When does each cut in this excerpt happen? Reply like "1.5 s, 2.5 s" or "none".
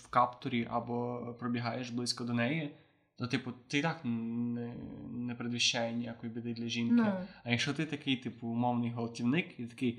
none